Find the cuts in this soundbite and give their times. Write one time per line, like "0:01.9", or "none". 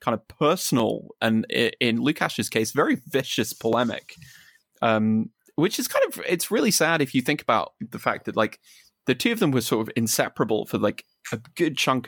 none